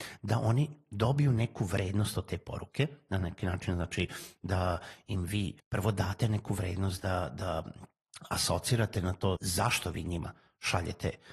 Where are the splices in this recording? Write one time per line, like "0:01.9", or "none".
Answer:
0:05.6
0:09.4